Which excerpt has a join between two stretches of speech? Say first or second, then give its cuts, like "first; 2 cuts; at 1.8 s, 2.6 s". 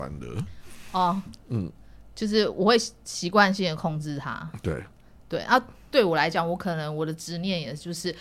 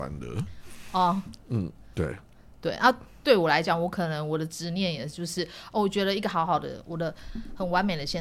second; 1 cut; at 1.9 s